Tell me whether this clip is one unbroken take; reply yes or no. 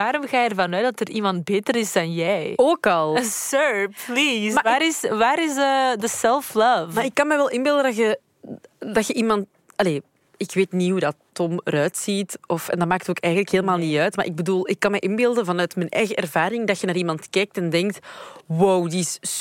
yes